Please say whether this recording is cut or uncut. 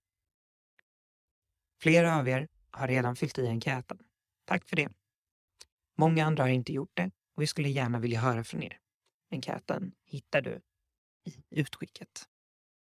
uncut